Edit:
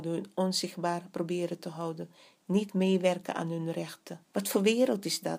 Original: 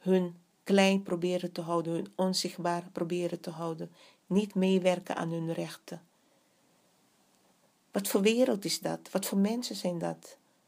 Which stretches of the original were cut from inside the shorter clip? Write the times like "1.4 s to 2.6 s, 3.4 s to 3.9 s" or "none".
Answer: 6.0 s to 7.8 s